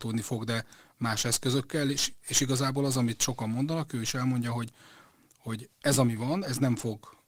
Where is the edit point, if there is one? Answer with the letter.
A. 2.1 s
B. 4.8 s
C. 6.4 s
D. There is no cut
D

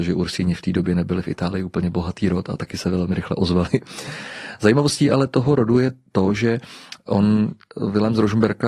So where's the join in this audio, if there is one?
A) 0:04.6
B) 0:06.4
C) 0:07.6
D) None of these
D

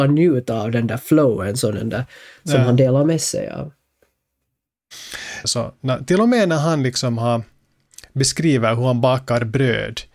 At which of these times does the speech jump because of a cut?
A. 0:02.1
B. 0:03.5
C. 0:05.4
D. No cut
C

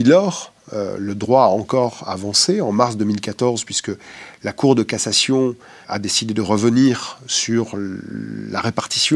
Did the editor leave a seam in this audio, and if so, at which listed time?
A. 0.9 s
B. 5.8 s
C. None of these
B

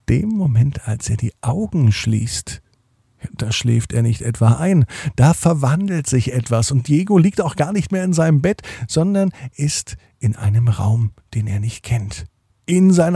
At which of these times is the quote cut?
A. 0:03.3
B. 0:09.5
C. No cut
B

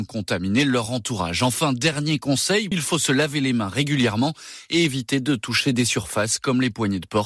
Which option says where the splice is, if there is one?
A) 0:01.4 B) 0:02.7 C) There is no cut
B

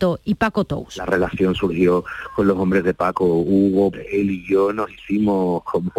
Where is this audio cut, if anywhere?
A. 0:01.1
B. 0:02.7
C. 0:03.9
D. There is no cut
C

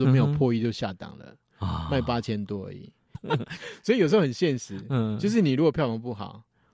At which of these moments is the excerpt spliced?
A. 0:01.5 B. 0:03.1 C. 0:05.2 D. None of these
B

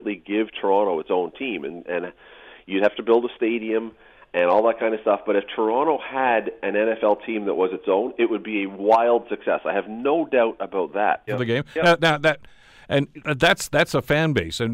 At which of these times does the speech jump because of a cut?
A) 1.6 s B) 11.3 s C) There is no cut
B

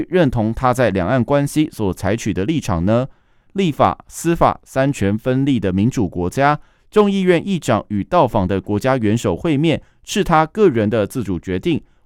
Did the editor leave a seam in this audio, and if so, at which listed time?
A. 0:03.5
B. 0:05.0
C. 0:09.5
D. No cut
A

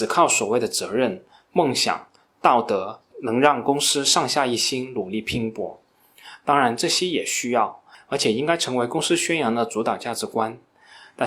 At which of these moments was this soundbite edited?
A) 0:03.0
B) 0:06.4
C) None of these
C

